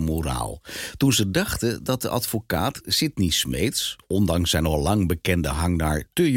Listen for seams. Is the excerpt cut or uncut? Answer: uncut